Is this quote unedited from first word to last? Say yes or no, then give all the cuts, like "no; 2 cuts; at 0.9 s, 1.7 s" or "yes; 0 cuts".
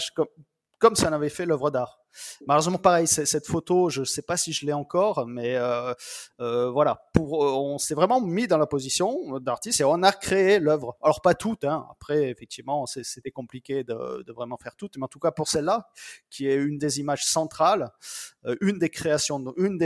yes; 0 cuts